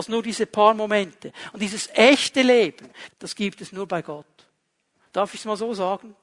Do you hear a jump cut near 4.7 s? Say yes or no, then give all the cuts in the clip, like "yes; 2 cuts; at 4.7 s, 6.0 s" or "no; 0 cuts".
no; 1 cut; at 3.1 s